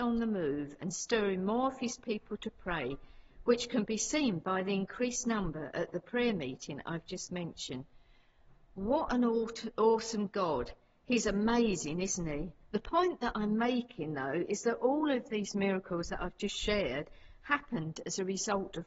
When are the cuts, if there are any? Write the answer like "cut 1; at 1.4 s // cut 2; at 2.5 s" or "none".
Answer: cut 1; at 12.6 s